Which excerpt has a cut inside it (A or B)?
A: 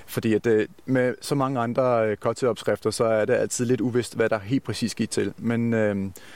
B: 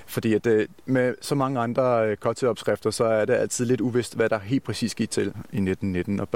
B